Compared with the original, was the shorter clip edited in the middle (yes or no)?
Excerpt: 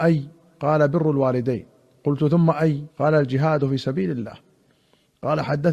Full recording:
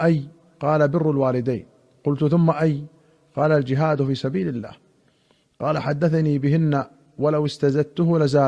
yes